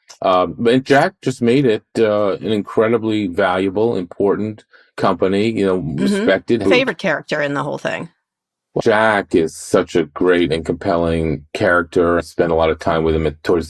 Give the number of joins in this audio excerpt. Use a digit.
3